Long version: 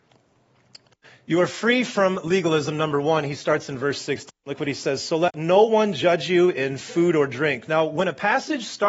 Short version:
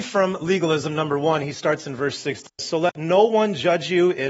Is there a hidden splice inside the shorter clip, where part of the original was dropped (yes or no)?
yes